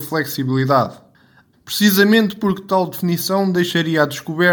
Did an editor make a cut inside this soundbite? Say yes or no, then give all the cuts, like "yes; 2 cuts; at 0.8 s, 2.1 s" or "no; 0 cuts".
yes; 1 cut; at 1.5 s